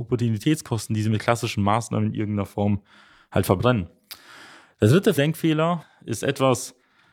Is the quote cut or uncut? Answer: uncut